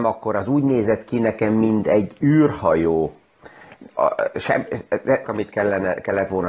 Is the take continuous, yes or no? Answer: no